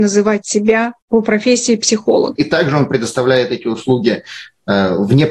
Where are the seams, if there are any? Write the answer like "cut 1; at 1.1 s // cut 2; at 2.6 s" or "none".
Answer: cut 1; at 1.0 s // cut 2; at 2.4 s